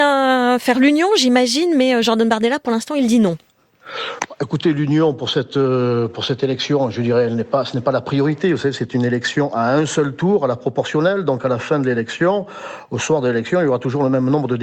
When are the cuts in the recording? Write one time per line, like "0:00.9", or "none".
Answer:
none